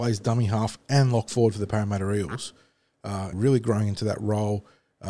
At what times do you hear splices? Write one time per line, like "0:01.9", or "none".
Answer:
0:03.3